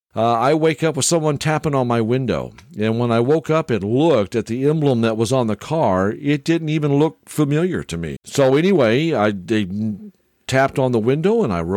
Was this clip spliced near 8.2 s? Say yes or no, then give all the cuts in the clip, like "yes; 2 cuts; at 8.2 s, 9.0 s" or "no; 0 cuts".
yes; 1 cut; at 8.2 s